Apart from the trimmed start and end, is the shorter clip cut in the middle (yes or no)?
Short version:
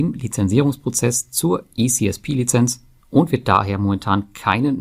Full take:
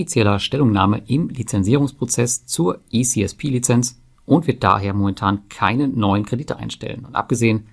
no